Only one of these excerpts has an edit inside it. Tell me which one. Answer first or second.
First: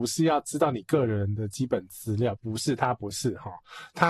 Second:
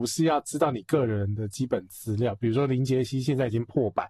first